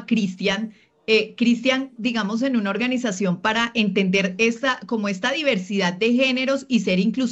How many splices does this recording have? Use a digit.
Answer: 1